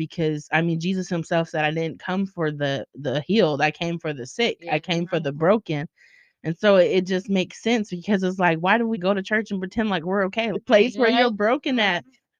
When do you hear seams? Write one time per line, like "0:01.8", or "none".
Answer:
0:08.9
0:10.5